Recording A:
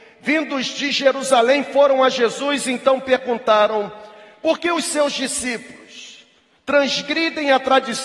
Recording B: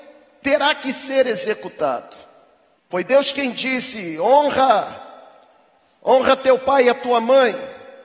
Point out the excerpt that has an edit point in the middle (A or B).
B